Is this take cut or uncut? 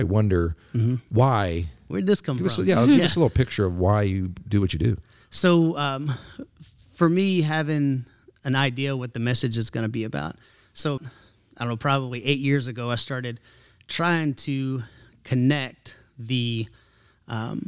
cut